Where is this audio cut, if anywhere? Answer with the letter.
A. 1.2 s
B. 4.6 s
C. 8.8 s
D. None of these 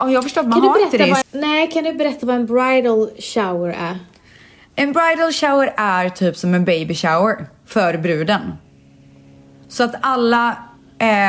A